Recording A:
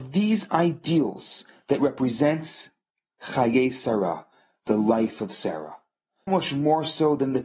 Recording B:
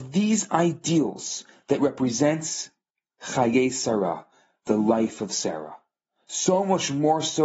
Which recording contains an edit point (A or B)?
A